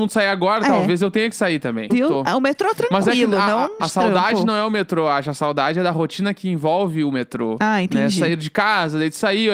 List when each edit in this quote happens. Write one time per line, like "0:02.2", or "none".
0:01.9
0:03.8